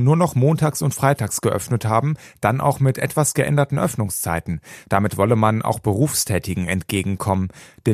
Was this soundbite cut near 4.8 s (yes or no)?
yes